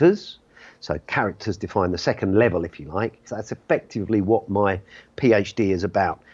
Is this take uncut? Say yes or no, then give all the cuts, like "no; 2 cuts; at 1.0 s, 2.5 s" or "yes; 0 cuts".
no; 1 cut; at 3.3 s